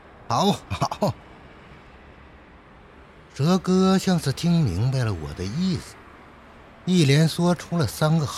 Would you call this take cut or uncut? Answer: uncut